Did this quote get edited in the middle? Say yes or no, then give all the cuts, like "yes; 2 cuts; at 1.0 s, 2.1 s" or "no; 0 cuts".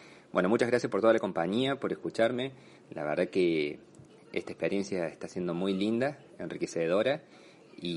yes; 1 cut; at 2.8 s